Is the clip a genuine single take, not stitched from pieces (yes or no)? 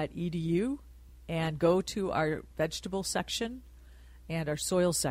yes